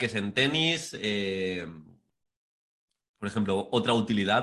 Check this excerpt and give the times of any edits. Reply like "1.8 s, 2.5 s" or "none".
none